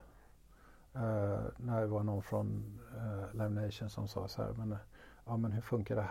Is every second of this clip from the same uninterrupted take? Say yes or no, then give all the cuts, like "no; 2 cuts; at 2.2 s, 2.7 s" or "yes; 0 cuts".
yes; 0 cuts